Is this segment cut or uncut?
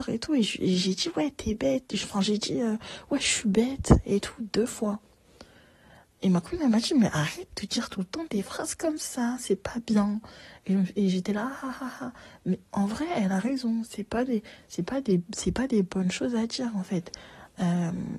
uncut